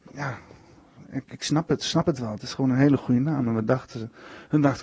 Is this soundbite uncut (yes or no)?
no